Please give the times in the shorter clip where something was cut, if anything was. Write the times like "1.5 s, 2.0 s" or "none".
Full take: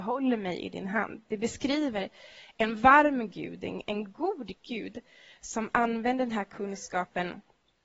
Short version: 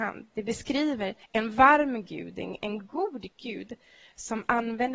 1.2 s